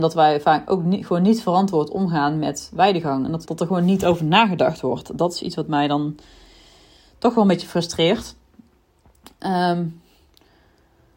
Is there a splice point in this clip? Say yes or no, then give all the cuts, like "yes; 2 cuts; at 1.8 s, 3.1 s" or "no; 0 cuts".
yes; 1 cut; at 3.5 s